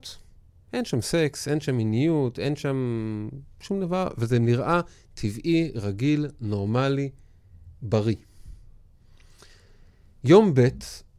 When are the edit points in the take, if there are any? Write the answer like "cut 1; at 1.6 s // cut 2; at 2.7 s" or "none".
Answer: none